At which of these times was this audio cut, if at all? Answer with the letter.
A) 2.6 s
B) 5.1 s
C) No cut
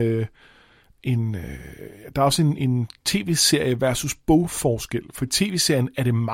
A